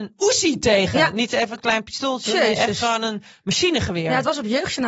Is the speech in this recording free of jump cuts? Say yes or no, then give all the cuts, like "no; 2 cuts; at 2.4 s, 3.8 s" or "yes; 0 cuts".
yes; 0 cuts